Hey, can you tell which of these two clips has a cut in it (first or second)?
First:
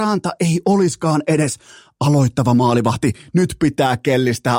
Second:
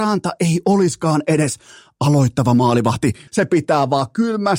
second